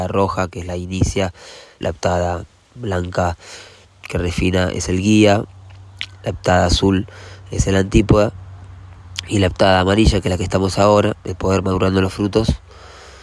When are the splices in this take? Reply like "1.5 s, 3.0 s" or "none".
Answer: 1.8 s